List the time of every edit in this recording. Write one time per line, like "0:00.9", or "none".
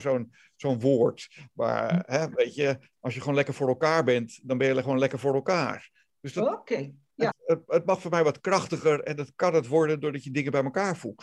0:07.3